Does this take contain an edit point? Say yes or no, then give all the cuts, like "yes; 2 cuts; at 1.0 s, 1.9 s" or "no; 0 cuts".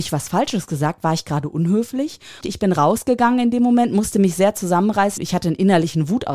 yes; 2 cuts; at 2.4 s, 5.2 s